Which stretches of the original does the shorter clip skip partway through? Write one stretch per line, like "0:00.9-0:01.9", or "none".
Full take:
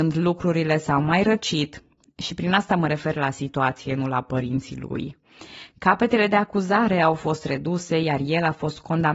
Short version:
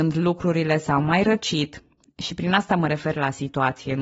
none